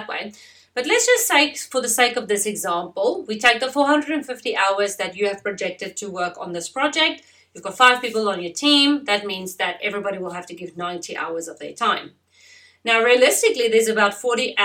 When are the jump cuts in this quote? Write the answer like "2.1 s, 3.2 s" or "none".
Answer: none